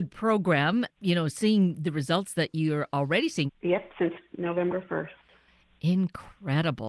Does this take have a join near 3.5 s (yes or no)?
yes